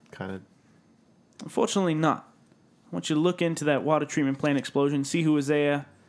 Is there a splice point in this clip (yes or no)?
no